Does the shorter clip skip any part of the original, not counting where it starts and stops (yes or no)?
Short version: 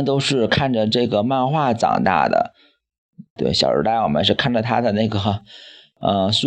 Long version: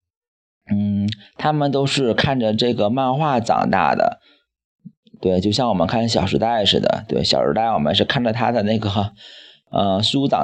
yes